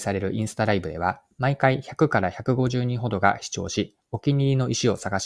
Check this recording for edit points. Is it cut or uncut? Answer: uncut